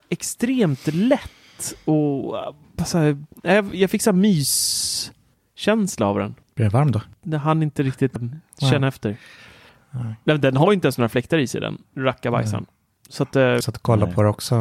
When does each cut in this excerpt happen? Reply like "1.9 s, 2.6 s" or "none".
8.2 s, 13.6 s